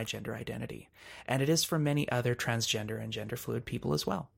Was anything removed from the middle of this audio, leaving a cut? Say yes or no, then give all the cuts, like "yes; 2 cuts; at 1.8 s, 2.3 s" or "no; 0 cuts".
no; 0 cuts